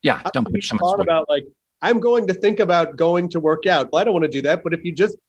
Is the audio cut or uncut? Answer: cut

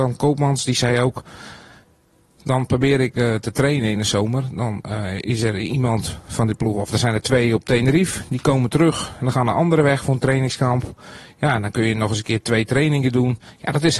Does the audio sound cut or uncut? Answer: uncut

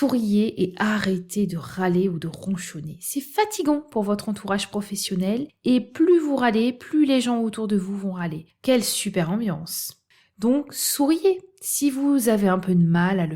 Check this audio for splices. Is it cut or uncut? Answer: uncut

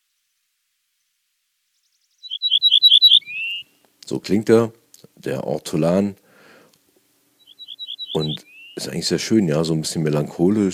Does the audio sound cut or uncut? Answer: uncut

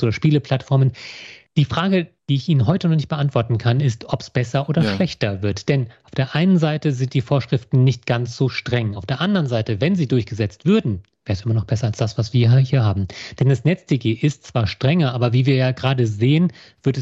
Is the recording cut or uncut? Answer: uncut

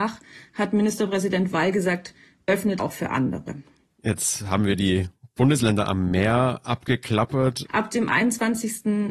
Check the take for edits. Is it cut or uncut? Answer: cut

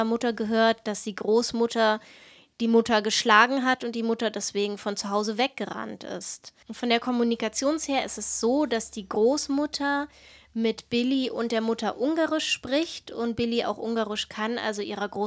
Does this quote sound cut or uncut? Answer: uncut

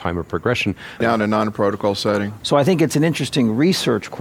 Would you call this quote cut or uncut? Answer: cut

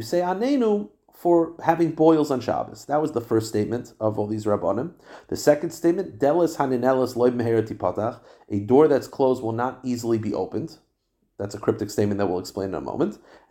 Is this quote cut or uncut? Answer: uncut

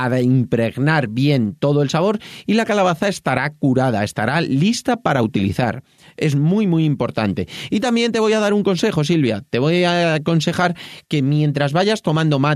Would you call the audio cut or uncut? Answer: uncut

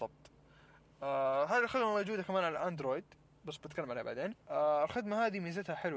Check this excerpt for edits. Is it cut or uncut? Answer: cut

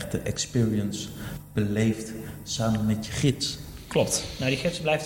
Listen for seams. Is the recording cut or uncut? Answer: uncut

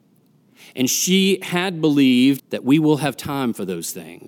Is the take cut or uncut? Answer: cut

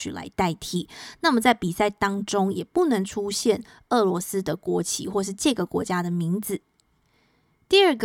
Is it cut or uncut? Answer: uncut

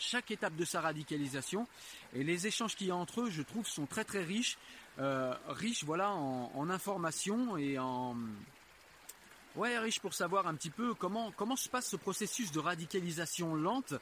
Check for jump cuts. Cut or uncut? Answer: uncut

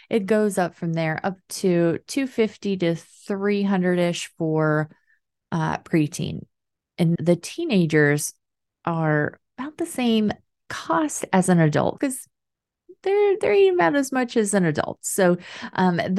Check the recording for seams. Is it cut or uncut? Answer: cut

